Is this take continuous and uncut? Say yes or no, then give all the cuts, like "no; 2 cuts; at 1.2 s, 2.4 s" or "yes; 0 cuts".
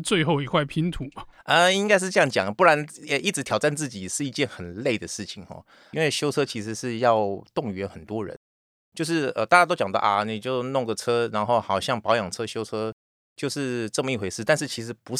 no; 1 cut; at 5.9 s